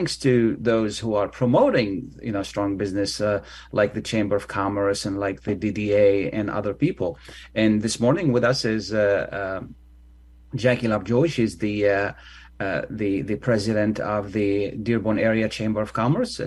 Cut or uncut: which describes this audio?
uncut